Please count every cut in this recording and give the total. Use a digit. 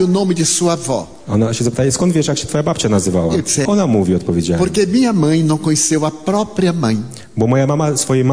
1